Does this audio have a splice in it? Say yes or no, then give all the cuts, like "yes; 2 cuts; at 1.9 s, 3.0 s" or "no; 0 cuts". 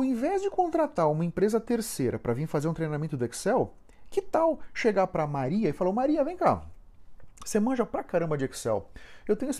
no; 0 cuts